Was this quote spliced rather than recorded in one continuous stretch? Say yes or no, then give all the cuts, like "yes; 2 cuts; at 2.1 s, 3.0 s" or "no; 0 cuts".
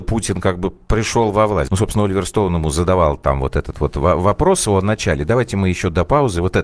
yes; 1 cut; at 1.7 s